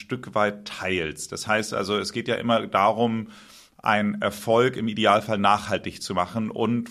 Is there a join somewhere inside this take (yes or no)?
no